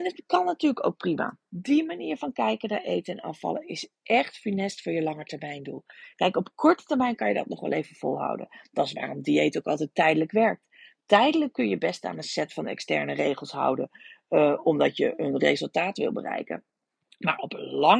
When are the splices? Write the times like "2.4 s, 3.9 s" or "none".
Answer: 1.5 s